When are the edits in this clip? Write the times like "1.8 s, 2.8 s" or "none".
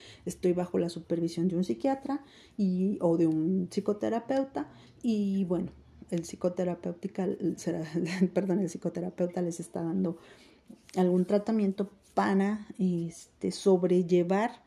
none